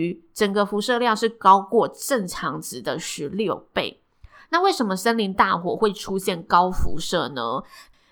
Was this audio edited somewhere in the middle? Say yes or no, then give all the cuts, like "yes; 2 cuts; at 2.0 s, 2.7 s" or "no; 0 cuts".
no; 0 cuts